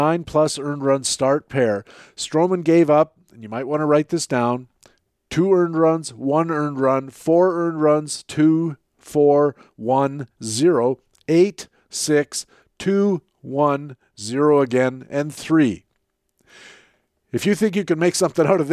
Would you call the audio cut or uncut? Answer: uncut